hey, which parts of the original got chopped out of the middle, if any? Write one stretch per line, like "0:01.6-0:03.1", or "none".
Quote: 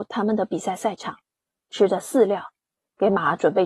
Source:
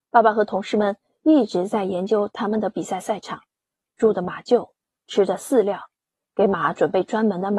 0:03.9-0:05.0